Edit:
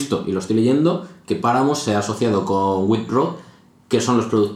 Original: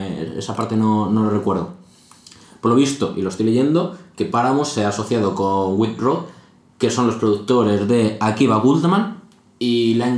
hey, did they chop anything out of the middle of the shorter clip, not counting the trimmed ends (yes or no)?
no